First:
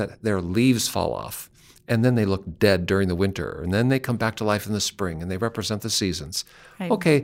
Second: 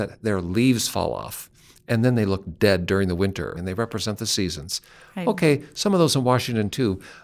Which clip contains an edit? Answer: second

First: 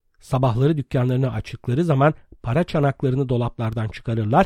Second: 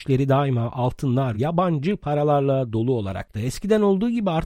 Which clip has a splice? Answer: second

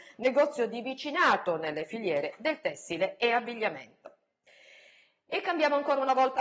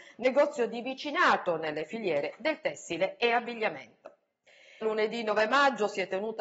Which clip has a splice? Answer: second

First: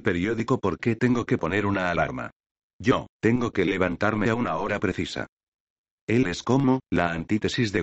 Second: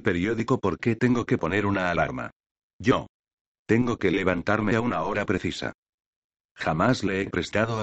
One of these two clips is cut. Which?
first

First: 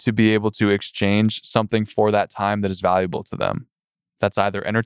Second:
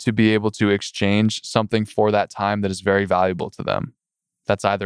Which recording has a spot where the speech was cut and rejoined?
first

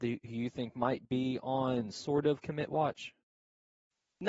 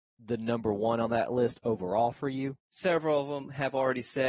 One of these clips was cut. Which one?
second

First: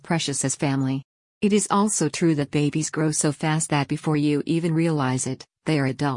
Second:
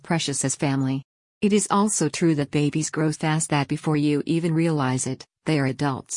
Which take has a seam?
second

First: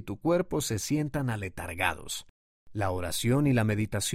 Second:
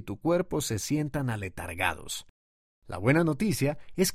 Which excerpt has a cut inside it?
first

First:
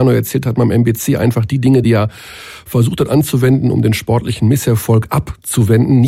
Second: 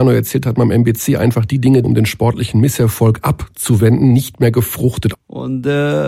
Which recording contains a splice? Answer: second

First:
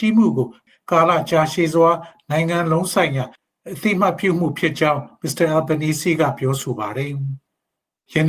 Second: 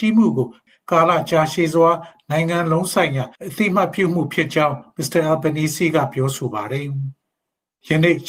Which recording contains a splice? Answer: second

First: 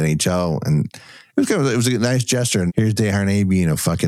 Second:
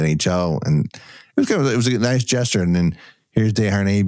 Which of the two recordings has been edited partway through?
first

